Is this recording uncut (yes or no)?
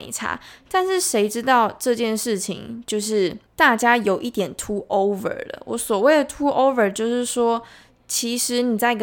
yes